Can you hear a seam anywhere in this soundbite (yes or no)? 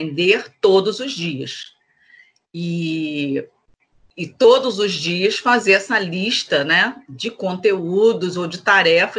no